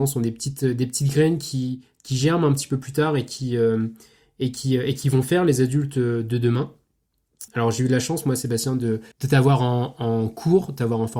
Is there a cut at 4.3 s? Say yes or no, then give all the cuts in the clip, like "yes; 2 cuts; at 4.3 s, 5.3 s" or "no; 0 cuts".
no; 2 cuts; at 7.5 s, 9.1 s